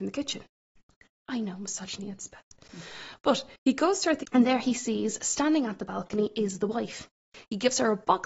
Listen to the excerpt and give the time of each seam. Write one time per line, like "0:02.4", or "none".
0:04.2

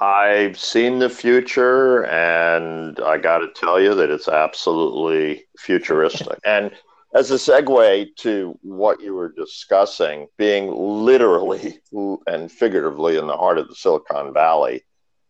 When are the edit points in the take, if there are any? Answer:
0:06.4
0:10.3

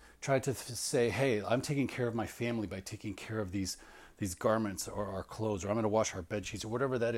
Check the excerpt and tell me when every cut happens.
none

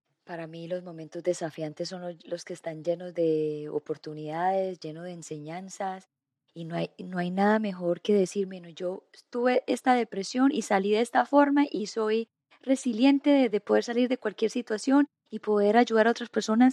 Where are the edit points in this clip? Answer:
0:13.5

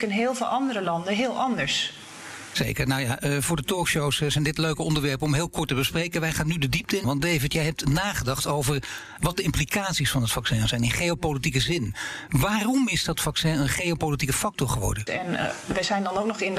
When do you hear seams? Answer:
0:07.0
0:15.1

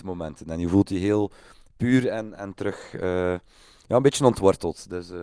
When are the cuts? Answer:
0:02.4

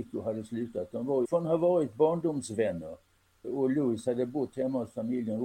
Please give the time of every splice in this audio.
0:01.2
0:03.4

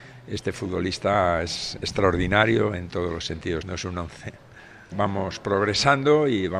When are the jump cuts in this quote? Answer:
0:03.6
0:04.9

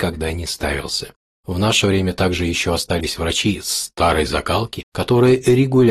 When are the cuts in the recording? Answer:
none

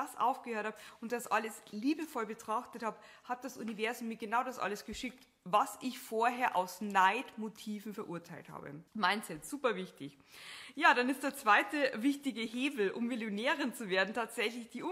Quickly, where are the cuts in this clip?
0:08.9

